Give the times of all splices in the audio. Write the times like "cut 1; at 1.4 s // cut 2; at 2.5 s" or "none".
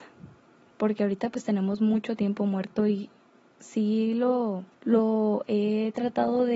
cut 1; at 4.7 s